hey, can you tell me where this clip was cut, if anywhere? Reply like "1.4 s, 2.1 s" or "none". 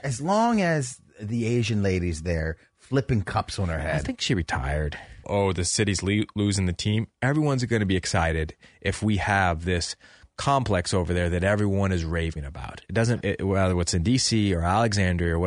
5.2 s, 13.2 s